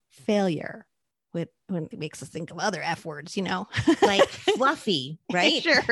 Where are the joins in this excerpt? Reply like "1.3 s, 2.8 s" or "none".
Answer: 1.9 s